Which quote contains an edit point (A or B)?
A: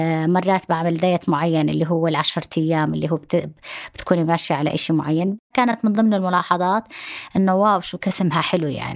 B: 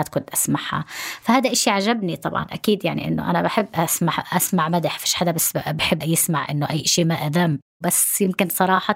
B